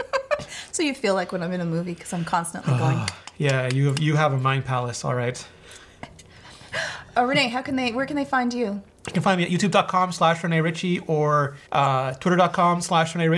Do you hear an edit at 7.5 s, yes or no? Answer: no